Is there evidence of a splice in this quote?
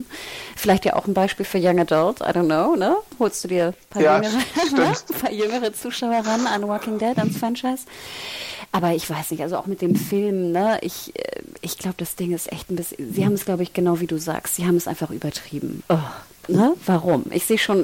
yes; 1 cut; at 15.8 s

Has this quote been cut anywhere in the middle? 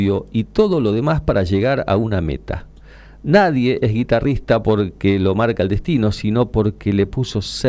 no; 0 cuts

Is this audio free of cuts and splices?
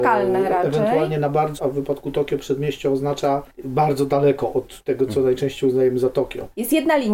no; 1 cut; at 1.6 s

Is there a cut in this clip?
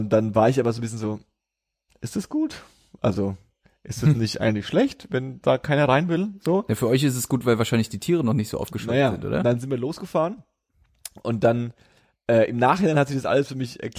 no; 0 cuts

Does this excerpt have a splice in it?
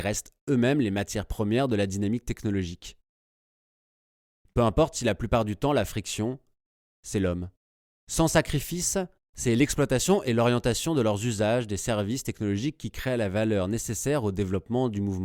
yes; 2 cuts; at 4.4 s, 7.9 s

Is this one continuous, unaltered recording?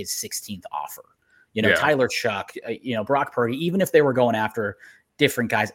yes; 0 cuts

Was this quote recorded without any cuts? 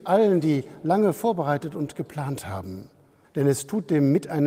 no; 1 cut; at 3.2 s

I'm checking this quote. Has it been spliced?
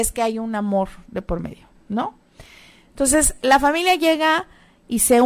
no; 0 cuts

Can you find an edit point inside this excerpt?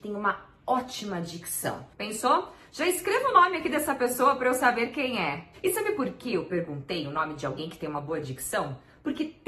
yes; 1 cut; at 1.9 s

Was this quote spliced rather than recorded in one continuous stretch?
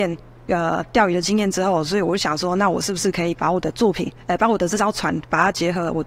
no; 0 cuts

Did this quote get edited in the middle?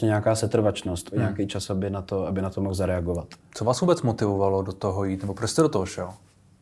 yes; 1 cut; at 1.1 s

